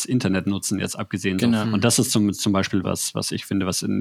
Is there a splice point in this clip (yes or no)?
yes